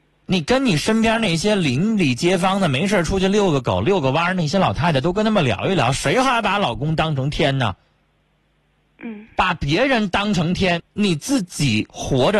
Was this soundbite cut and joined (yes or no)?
yes